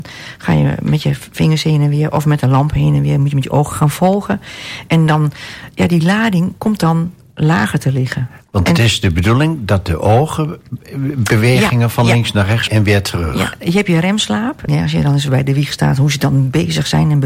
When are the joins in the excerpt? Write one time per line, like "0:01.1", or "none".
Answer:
0:12.7
0:14.7